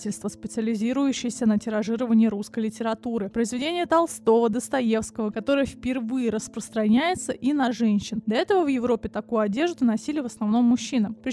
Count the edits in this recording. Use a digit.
1